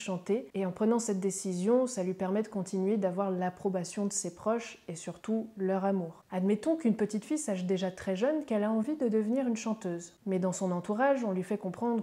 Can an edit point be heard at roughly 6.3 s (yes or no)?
yes